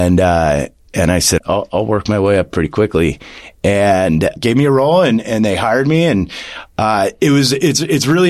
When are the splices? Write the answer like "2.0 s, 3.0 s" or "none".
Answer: 1.4 s, 4.4 s